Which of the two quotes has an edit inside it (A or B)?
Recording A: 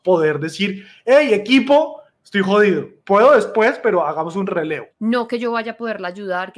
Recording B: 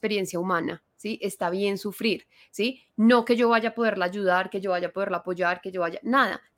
A